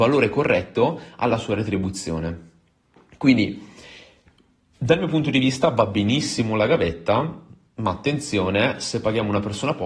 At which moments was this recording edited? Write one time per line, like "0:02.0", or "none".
none